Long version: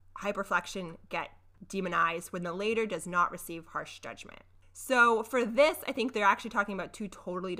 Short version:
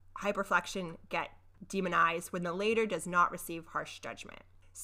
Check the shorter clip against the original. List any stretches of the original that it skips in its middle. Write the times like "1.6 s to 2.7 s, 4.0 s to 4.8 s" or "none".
none